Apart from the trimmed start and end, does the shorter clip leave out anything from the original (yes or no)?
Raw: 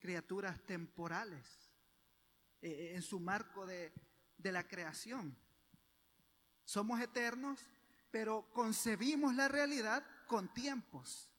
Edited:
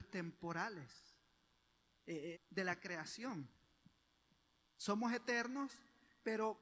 yes